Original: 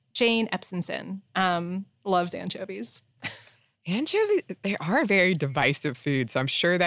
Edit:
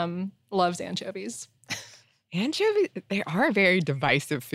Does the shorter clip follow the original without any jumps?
yes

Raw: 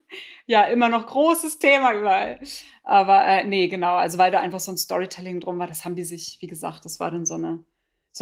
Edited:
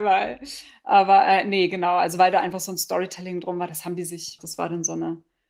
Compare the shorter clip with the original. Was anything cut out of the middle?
yes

